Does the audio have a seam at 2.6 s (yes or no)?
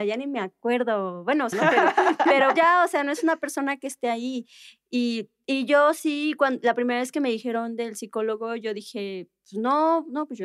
yes